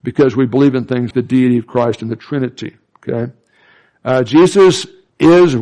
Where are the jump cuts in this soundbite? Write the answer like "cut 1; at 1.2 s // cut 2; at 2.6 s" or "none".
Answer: cut 1; at 1.1 s